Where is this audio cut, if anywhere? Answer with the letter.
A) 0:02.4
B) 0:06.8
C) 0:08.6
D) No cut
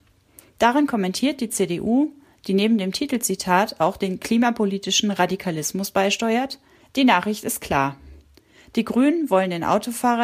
B